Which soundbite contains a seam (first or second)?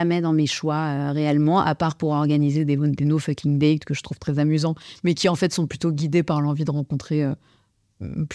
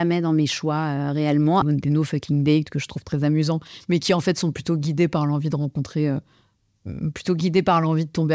second